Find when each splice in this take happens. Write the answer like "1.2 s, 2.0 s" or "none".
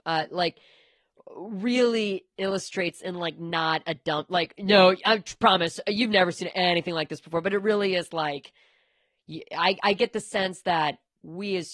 none